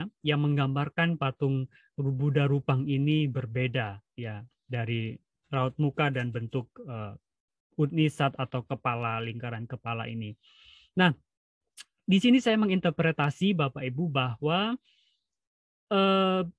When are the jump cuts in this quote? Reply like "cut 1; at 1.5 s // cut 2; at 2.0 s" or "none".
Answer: none